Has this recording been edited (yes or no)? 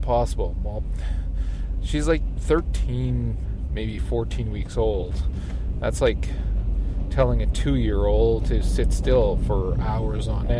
no